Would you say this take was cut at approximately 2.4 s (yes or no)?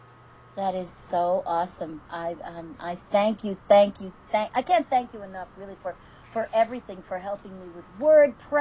no